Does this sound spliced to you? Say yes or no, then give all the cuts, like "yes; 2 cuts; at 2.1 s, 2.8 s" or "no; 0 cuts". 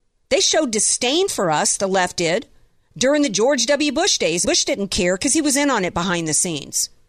yes; 1 cut; at 4.5 s